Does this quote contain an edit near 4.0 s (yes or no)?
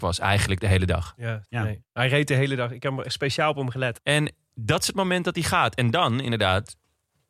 yes